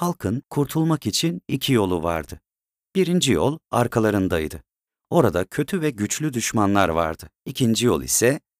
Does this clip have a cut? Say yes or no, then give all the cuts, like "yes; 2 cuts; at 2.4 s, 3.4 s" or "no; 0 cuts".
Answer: yes; 1 cut; at 7.4 s